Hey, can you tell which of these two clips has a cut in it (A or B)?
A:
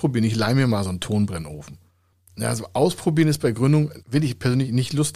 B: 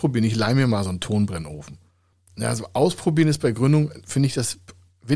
A